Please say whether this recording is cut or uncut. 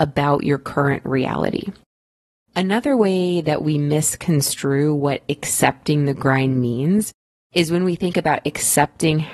uncut